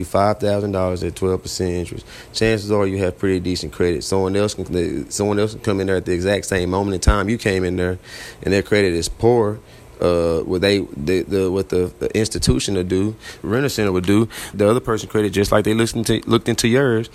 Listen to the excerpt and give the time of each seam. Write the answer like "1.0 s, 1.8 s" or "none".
13.4 s, 14.5 s